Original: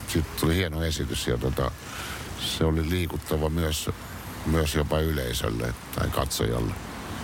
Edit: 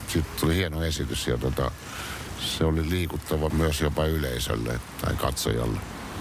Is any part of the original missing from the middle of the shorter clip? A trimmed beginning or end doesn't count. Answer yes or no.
yes